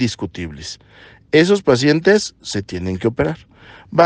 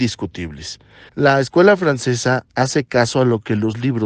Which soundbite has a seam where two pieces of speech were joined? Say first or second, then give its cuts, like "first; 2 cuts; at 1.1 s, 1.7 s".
second; 1 cut; at 1.1 s